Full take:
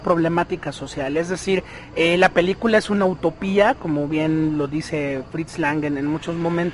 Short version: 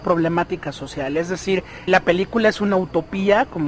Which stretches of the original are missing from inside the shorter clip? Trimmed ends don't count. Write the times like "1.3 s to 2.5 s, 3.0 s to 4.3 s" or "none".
1.9 s to 2.2 s